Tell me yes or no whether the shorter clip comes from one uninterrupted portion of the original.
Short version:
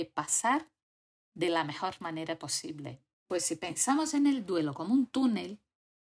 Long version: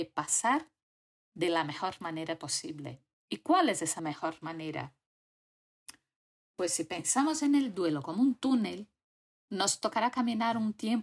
no